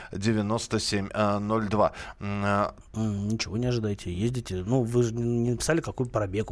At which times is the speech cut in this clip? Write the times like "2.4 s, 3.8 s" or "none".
2.8 s